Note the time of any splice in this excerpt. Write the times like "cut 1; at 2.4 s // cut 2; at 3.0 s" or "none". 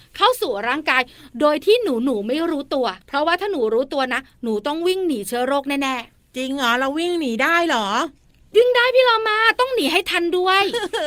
cut 1; at 3.0 s